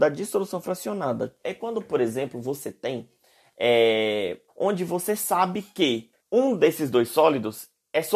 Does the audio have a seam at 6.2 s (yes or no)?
yes